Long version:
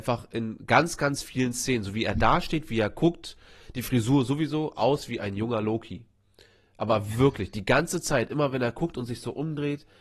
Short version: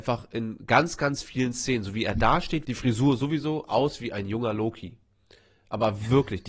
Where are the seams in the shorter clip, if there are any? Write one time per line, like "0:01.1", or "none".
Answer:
0:02.6